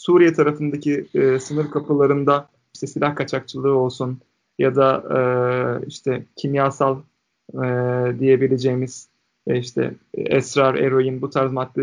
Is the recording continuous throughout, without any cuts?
yes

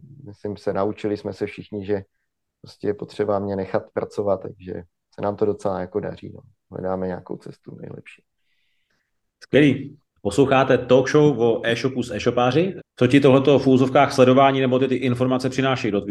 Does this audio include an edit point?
yes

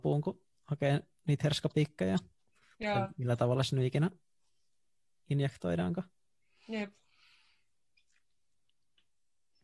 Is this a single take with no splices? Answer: yes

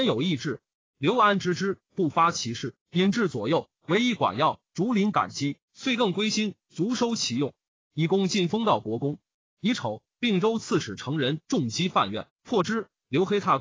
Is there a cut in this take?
no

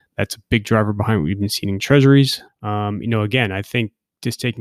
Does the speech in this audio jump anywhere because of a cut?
yes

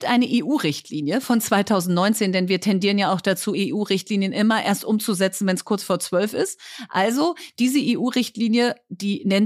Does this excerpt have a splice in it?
no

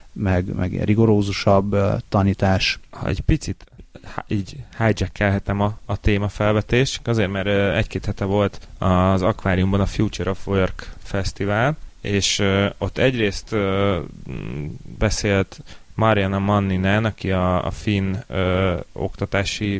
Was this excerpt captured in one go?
yes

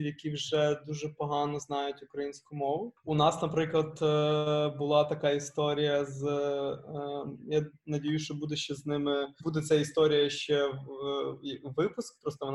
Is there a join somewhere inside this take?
no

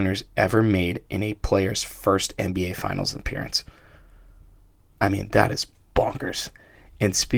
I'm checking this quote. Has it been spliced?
no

